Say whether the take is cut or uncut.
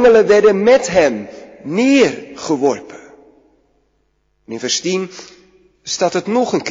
uncut